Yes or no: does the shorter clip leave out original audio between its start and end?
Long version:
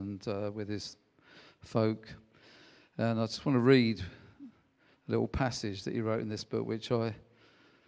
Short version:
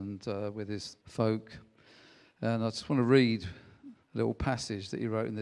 yes